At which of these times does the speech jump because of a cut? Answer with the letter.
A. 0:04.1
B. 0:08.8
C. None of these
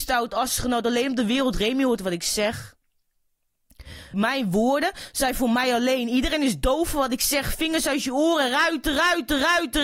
A